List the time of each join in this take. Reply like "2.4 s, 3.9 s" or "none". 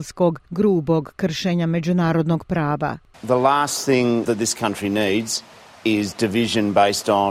3.1 s, 4.2 s